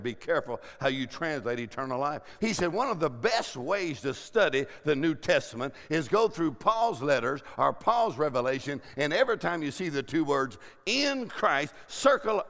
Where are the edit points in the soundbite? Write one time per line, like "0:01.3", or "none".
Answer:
0:02.4

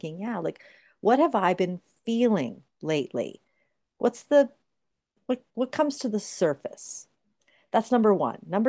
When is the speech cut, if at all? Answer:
none

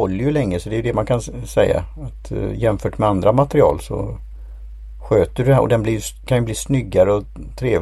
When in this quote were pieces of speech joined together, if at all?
none

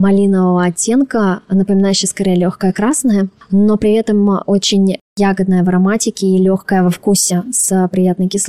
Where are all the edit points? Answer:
none

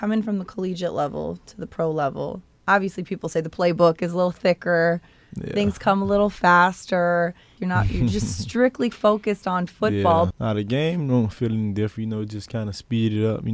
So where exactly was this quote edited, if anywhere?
0:07.6
0:10.3

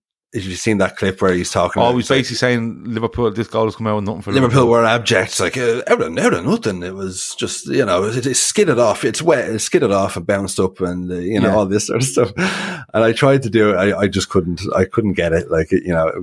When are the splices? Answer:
none

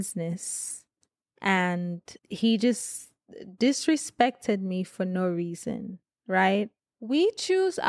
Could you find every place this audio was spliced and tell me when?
0:02.2
0:06.8

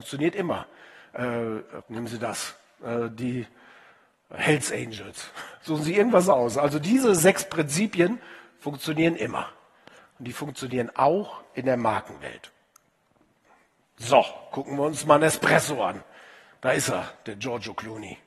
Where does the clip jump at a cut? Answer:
0:01.8
0:05.6

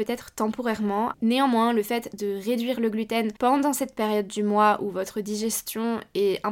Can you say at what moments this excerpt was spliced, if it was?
0:01.1
0:03.4

